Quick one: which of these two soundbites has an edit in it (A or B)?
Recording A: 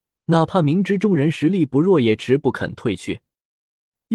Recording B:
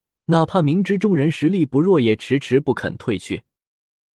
A